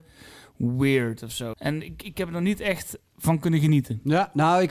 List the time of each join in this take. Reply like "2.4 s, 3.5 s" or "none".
1.5 s